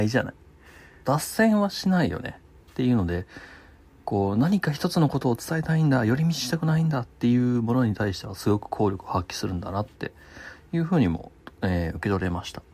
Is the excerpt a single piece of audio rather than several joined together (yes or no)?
no